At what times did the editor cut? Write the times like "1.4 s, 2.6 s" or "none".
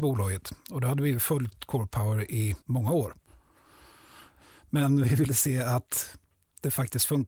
2.6 s